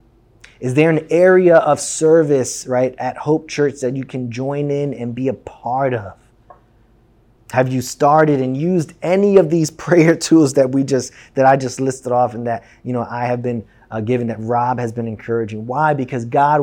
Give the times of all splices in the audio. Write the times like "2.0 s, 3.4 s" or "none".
7.4 s